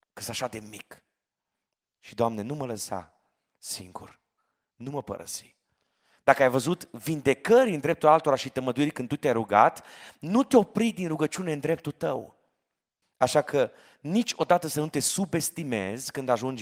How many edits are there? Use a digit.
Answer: 1